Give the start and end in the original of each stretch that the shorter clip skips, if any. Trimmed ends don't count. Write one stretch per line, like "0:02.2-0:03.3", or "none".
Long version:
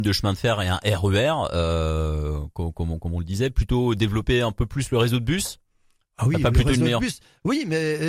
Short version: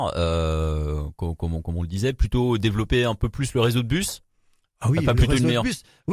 none

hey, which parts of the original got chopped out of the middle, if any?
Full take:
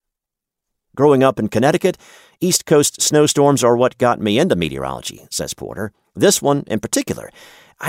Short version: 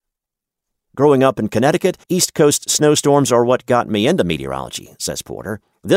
0:02.0-0:02.4

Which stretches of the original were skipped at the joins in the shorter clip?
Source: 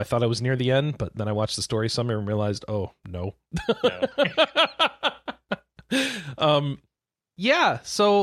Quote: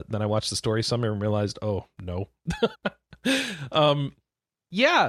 0:03.8-0:05.4

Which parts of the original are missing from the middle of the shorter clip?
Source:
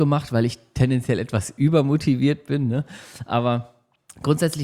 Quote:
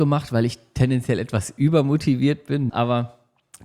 0:02.7-0:03.3

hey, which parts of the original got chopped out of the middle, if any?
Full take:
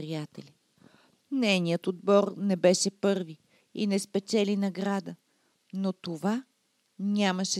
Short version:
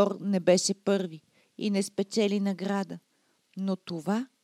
none

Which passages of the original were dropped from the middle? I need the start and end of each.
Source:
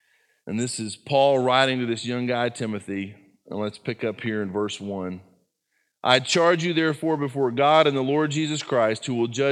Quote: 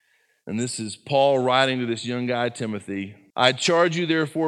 0:03.3-0:06.0

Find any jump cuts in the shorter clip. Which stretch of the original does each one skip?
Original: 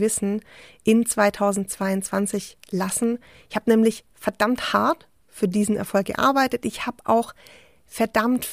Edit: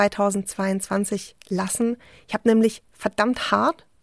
none

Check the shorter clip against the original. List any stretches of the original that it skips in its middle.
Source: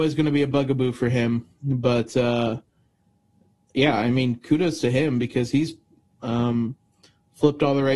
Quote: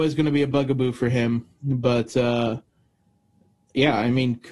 none

